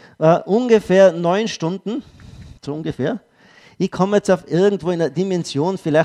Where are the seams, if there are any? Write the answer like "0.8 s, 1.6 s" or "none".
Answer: 2.6 s